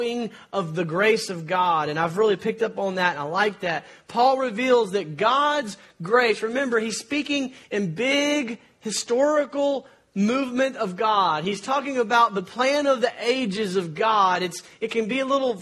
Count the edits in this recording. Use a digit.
0